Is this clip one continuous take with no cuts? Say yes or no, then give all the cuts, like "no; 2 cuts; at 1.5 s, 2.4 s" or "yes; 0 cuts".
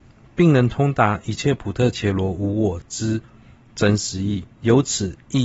no; 1 cut; at 4.5 s